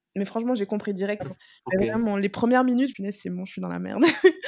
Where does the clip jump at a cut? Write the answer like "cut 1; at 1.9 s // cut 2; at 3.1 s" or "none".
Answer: cut 1; at 1.2 s // cut 2; at 2.9 s